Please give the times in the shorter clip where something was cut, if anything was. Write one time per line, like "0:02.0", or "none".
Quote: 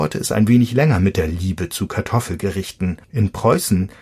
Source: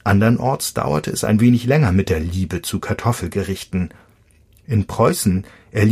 0:03.0